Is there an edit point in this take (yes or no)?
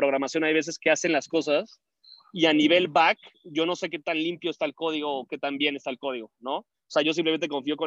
no